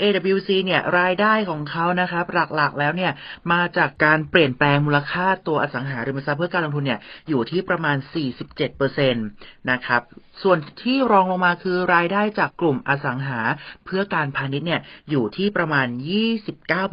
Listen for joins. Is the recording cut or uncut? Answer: cut